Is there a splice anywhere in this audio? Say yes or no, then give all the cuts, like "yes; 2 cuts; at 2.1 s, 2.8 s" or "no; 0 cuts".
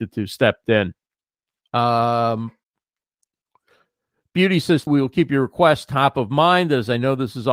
yes; 2 cuts; at 1.6 s, 4.9 s